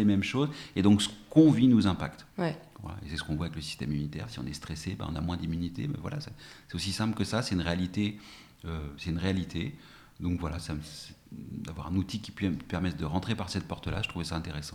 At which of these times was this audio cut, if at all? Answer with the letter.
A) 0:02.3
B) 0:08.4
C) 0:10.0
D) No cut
A